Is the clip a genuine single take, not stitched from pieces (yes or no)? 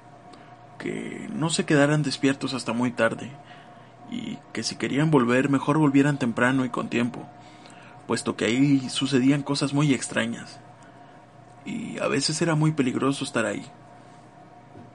yes